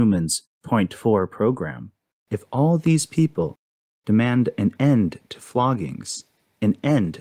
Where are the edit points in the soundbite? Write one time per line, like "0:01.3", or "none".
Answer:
0:02.1